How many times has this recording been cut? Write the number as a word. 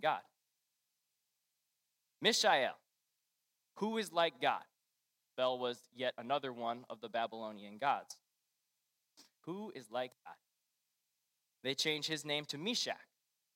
two